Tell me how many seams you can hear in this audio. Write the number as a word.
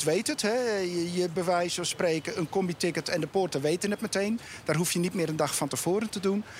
one